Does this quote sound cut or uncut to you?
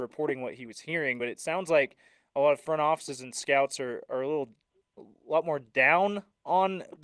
uncut